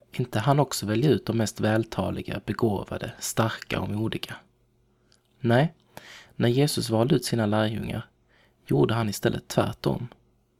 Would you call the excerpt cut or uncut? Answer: uncut